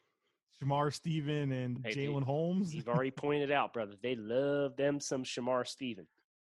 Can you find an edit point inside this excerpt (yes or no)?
yes